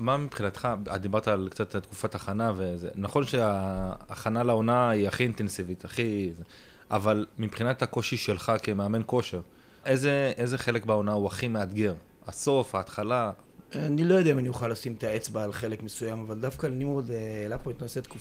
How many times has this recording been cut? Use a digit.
2